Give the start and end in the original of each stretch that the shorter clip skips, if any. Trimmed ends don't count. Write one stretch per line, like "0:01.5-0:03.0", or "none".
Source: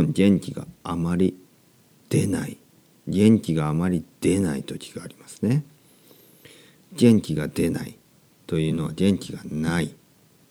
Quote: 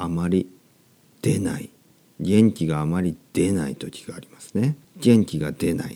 0:05.7-0:06.8